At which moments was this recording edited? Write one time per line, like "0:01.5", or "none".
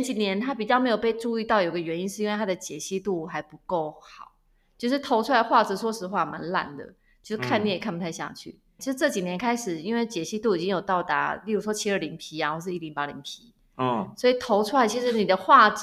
0:08.8

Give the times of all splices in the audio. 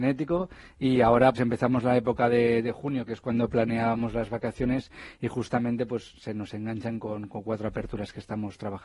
0:01.3

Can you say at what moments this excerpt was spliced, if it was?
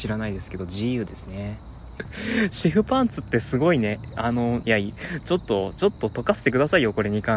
0:02.0
0:04.6

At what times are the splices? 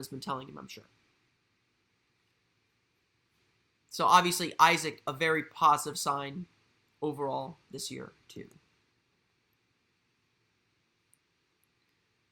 none

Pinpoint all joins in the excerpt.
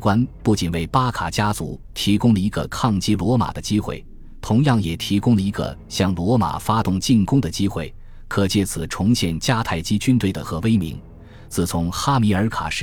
0:10.4

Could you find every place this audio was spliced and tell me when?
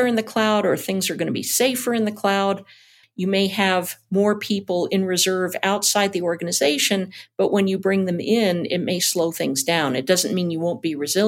0:03.0

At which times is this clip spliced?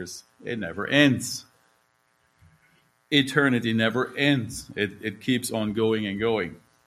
none

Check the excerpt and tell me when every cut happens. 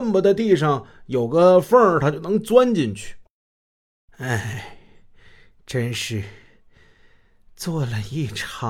none

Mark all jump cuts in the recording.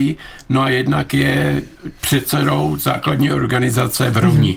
0:02.0

